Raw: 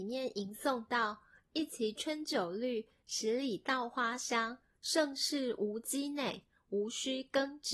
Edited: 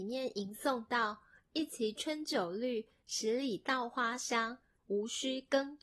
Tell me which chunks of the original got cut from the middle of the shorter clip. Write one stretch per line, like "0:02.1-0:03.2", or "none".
0:04.8-0:06.6